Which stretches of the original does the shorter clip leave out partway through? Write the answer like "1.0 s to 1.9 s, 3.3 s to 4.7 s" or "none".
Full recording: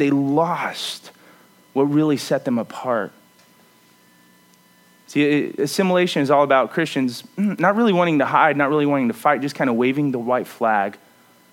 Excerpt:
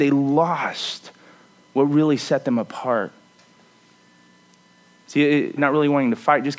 5.6 s to 8.5 s